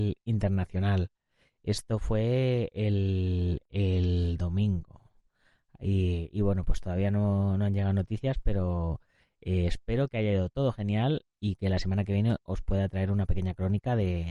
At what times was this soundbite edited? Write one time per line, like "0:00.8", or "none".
none

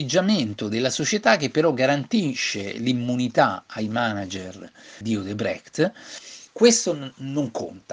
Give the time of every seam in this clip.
0:05.0
0:06.5

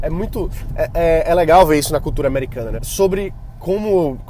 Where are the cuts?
0:02.8

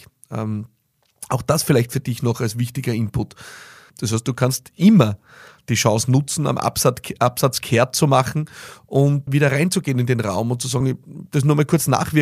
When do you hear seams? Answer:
0:03.9
0:09.3
0:10.8

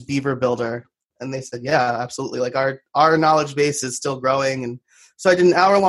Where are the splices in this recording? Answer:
0:01.0

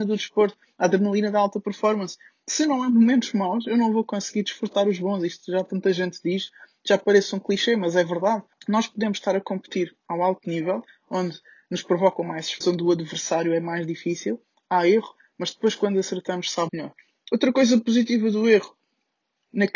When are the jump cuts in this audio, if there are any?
0:08.5
0:12.6
0:16.7

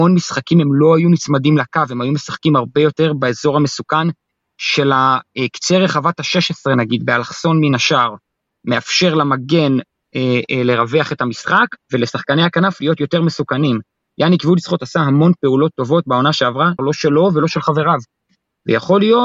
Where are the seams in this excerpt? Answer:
0:11.8
0:16.8

